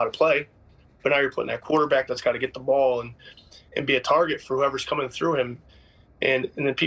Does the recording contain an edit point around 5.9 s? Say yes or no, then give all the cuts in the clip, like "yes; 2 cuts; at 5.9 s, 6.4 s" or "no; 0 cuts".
no; 1 cut; at 2.1 s